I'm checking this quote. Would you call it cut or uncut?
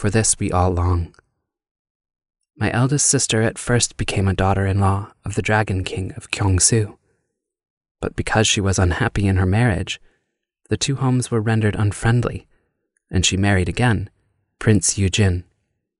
uncut